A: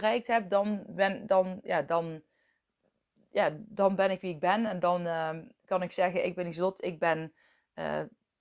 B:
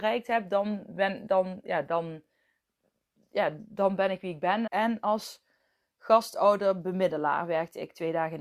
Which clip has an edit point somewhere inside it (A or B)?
B